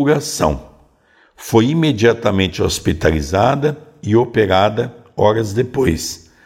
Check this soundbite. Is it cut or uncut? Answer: uncut